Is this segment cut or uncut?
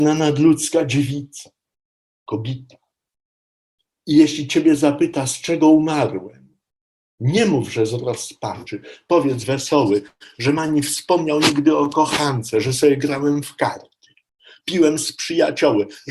cut